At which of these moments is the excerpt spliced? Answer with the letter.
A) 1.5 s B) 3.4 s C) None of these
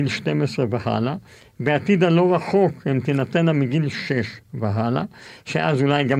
C